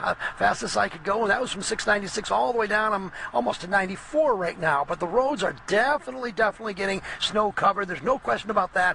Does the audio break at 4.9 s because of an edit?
no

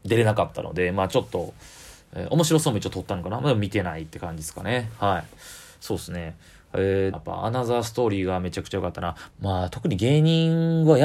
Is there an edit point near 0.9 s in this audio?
no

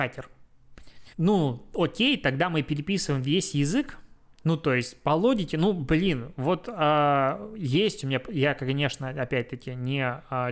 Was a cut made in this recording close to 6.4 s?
no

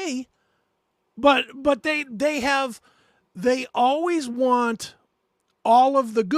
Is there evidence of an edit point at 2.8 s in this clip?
no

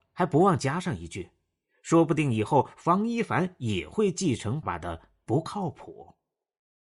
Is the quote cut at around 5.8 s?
no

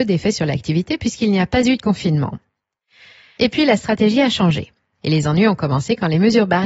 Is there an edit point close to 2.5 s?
no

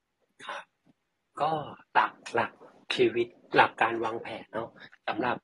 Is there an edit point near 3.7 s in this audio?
yes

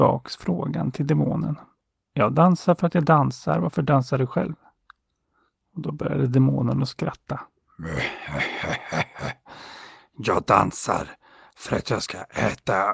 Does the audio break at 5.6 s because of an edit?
no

